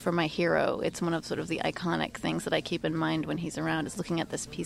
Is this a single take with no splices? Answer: yes; 0 cuts

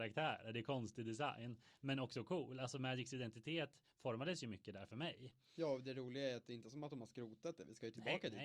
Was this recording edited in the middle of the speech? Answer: no; 0 cuts

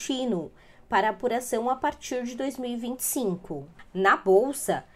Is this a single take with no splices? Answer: no; 1 cut; at 3.9 s

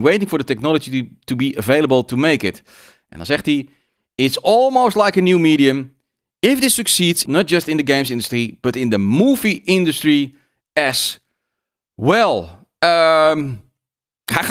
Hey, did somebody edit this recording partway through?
yes; 1 cut; at 7.3 s

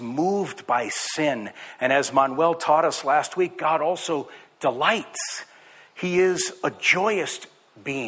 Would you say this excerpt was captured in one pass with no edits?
yes; 0 cuts

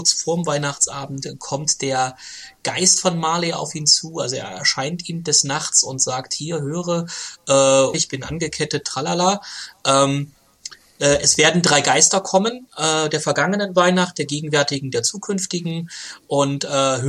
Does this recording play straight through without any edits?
no; 1 cut; at 7.9 s

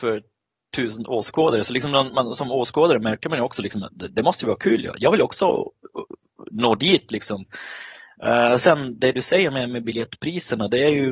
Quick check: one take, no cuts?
yes; 0 cuts

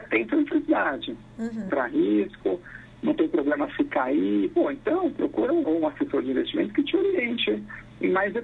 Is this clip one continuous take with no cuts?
no; 2 cuts; at 1.7 s, 5.6 s

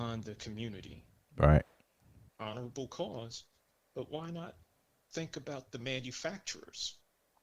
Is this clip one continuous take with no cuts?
no; 1 cut; at 2.3 s

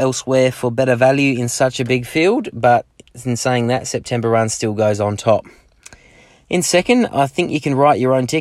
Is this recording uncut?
yes; 0 cuts

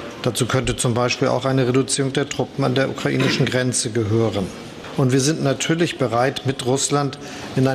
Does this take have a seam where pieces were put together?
no; 0 cuts

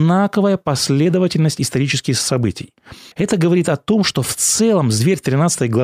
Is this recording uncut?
no; 1 cut; at 3.1 s

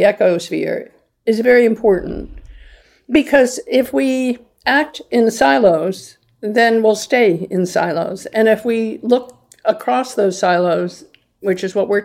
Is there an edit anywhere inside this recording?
no; 0 cuts

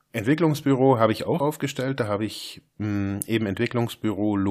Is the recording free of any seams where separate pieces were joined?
no; 1 cut; at 1.4 s

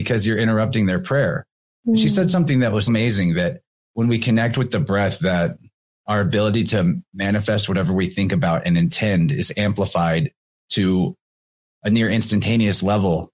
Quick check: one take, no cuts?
no; 1 cut; at 2.9 s

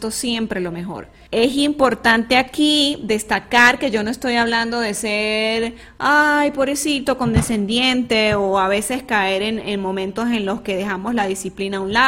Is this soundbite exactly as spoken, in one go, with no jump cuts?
no; 1 cut; at 1.3 s

